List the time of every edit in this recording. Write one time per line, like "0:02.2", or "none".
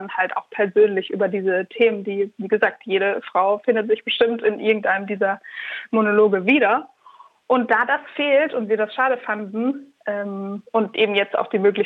none